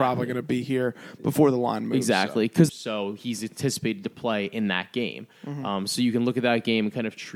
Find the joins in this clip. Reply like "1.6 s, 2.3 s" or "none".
2.7 s